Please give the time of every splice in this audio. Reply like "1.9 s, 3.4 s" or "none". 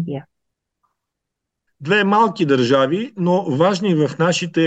1.7 s